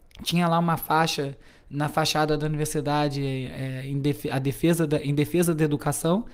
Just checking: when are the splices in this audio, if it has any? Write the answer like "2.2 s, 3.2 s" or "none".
none